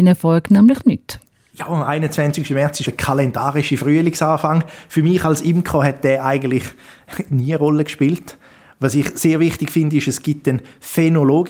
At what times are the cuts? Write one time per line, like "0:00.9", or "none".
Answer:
none